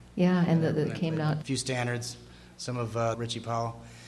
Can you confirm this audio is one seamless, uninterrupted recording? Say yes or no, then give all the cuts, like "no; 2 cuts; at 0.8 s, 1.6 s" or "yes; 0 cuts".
no; 2 cuts; at 1.4 s, 3.1 s